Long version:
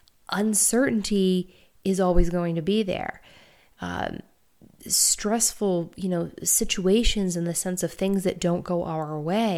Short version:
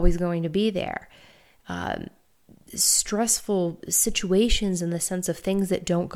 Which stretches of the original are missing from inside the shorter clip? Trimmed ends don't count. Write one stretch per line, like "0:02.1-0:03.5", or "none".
0:05.9-0:06.3